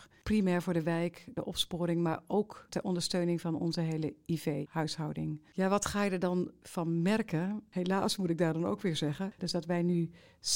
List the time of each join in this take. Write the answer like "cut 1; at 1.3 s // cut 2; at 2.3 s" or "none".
cut 1; at 9.4 s

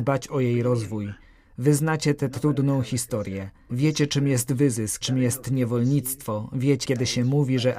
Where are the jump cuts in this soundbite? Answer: cut 1; at 3.7 s // cut 2; at 5.0 s // cut 3; at 6.8 s

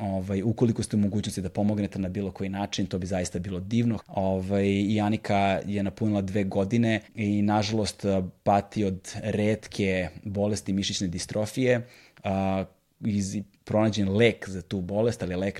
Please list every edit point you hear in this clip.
cut 1; at 4.0 s // cut 2; at 7.0 s

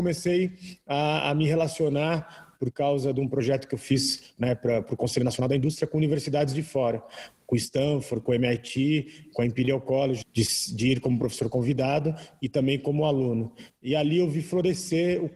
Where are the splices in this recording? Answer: cut 1; at 10.2 s

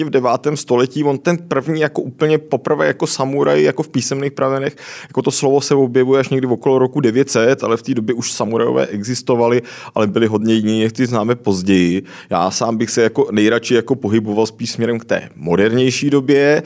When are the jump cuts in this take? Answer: none

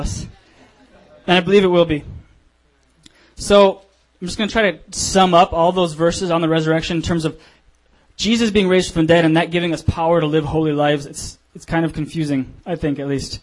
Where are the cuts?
cut 1; at 11.5 s

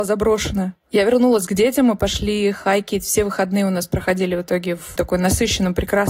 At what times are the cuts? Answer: cut 1; at 5.0 s

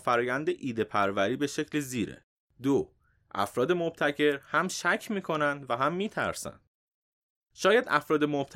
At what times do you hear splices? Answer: cut 1; at 2.4 s

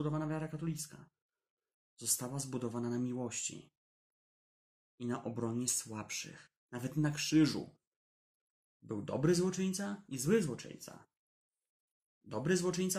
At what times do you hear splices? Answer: cut 1; at 6.6 s

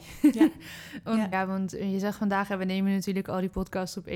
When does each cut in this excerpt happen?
cut 1; at 1.3 s

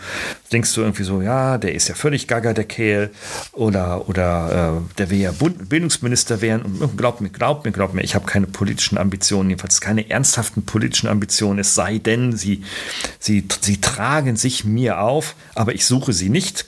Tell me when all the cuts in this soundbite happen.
none

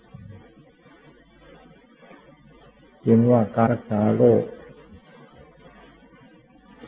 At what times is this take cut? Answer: cut 1; at 3.7 s

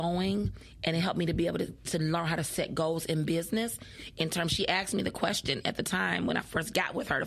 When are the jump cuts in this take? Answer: none

